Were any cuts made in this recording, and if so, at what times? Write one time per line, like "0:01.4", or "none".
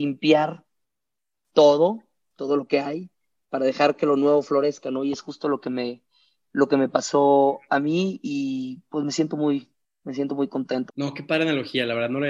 0:10.9